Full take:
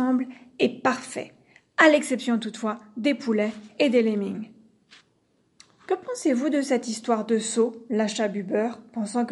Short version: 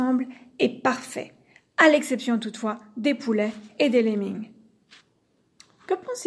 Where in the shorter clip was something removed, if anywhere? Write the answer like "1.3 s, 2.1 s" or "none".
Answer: none